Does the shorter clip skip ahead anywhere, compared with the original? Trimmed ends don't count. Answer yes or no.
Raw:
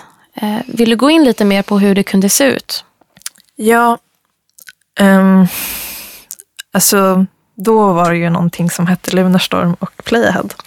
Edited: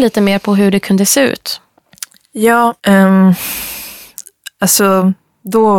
yes